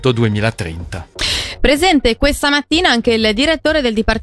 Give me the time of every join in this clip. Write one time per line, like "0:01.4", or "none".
none